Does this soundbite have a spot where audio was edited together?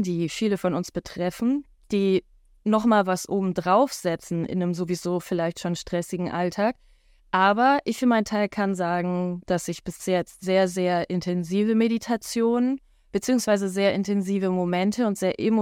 yes; 1 cut; at 7.2 s

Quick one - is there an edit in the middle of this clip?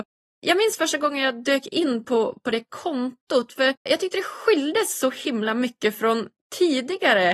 yes; 1 cut; at 3.9 s

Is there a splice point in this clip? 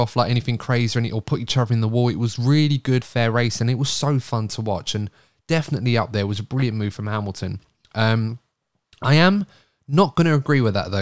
yes; 1 cut; at 3.0 s

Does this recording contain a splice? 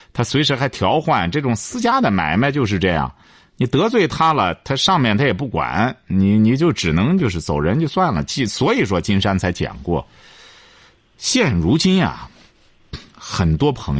no; 0 cuts

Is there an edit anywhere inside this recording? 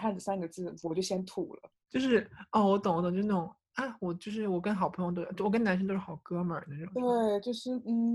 no; 0 cuts

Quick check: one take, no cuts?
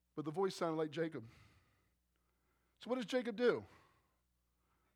yes; 0 cuts

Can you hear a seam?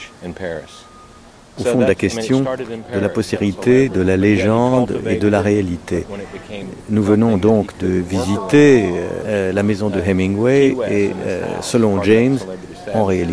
yes; 2 cuts; at 1.6 s, 9.2 s

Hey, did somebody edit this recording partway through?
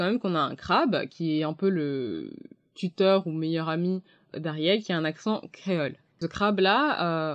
no; 0 cuts

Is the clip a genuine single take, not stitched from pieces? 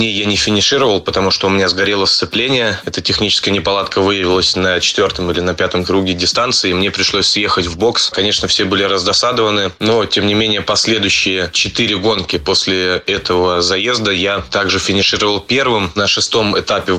yes; 0 cuts

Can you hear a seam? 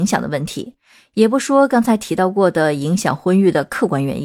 no; 0 cuts

